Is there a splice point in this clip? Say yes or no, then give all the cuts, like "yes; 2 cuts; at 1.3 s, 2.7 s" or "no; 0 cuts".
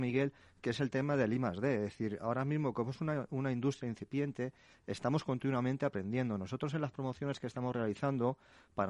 no; 0 cuts